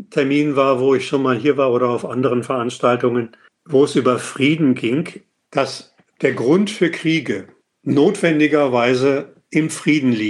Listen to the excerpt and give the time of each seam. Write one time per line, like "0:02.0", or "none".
0:05.5